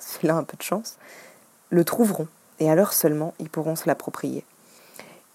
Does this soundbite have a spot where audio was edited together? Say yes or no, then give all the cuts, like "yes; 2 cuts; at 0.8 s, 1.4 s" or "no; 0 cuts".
no; 0 cuts